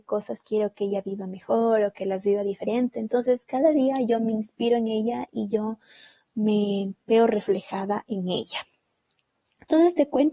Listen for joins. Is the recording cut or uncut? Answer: uncut